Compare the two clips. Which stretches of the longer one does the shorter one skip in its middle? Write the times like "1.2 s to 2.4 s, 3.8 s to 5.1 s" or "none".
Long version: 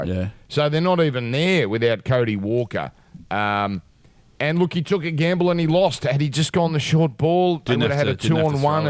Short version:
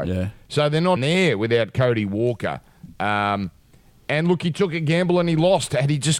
1.0 s to 1.3 s